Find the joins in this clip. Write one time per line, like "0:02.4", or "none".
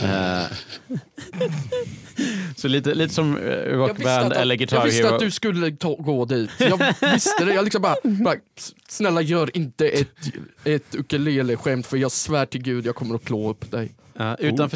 none